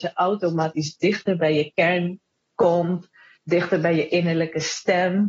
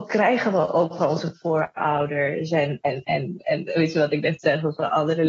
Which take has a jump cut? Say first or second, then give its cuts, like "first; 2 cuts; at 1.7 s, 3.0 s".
second; 1 cut; at 3.4 s